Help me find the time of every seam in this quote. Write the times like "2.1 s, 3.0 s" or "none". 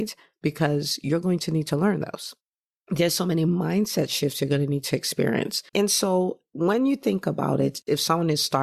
5.7 s